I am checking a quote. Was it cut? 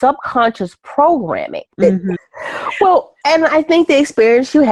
yes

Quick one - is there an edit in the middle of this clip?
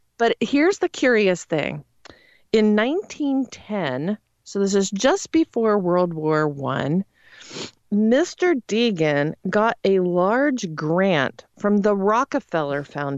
yes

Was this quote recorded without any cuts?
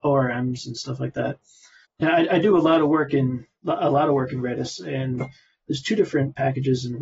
no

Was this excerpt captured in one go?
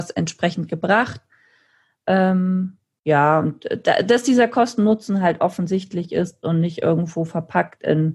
yes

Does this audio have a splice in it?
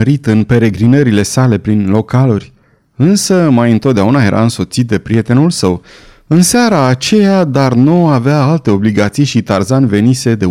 no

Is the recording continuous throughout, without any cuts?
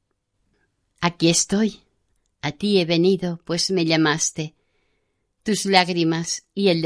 yes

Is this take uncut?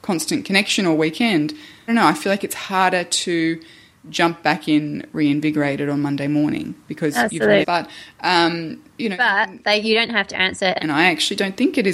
no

